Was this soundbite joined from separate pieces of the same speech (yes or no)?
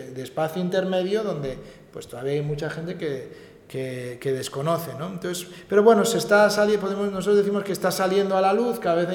no